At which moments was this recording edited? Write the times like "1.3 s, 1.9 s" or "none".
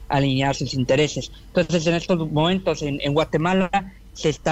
none